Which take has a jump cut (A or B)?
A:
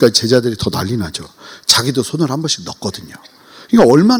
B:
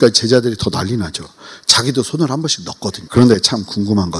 B